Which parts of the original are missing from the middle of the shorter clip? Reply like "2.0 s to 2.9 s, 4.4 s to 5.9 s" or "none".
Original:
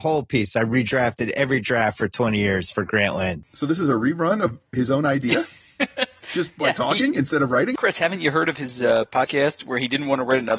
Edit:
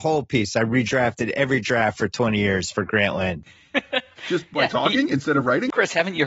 3.5 s to 5.5 s